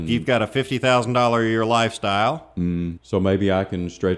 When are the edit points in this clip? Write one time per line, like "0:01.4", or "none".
0:03.0

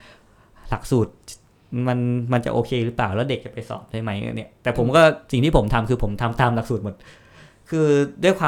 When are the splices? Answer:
none

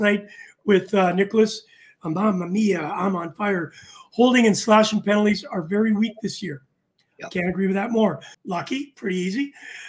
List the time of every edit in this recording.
0:08.3

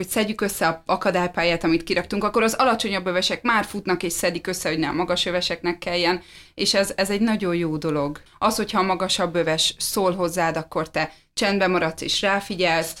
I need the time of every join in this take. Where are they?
0:08.3

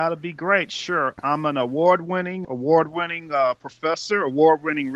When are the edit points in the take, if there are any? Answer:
0:02.4

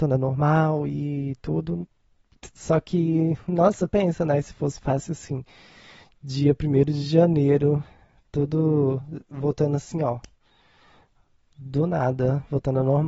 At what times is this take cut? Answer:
none

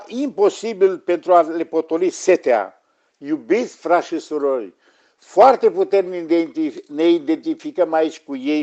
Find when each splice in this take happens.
none

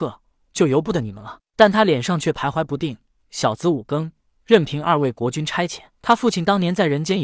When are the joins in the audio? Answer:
0:03.2
0:05.9

